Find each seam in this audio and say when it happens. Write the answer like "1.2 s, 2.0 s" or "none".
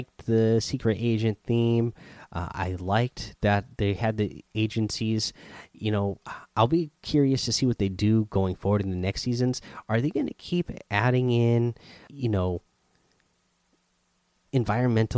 12.1 s

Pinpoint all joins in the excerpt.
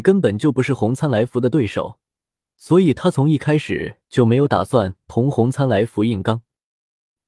none

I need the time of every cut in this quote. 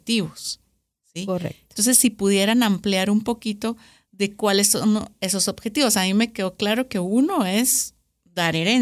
none

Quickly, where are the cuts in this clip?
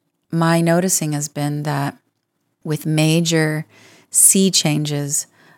none

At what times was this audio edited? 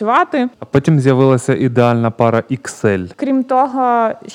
3.1 s

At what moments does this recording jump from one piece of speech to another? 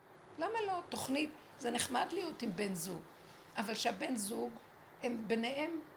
5.0 s

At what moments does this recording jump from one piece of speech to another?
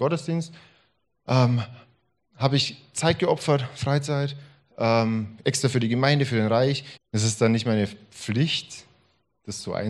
7.0 s

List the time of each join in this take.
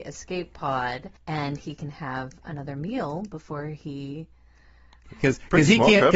1.2 s, 5.0 s

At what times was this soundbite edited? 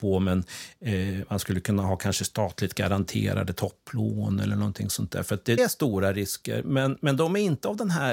5.6 s

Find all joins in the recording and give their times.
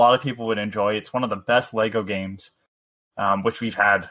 none

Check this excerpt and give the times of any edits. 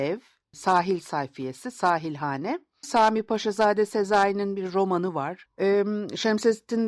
2.8 s, 5.5 s

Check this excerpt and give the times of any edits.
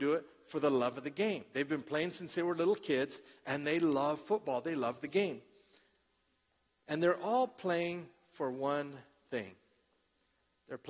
none

